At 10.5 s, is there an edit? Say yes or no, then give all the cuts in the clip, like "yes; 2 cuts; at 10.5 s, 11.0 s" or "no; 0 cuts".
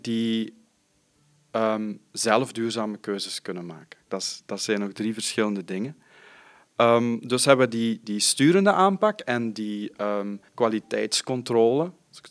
yes; 2 cuts; at 4.1 s, 10.5 s